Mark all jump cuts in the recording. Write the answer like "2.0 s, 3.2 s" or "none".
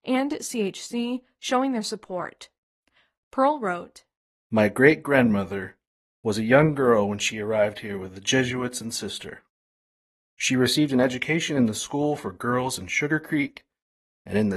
6.1 s